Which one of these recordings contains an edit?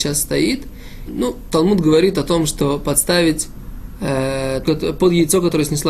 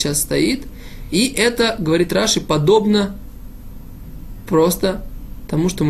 first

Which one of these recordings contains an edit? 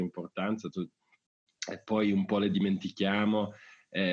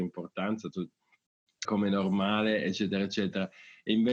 second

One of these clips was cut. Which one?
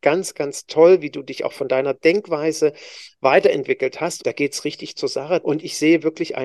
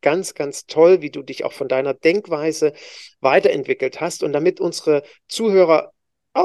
first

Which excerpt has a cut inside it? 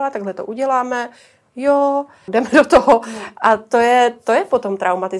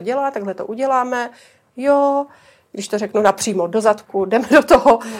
first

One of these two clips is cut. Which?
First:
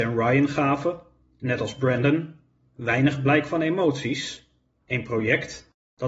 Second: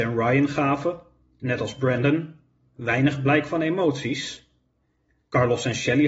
first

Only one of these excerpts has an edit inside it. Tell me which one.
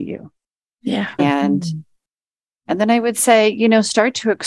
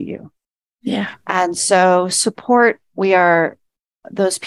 first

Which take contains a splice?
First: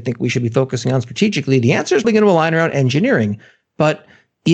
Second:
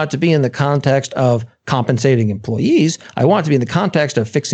first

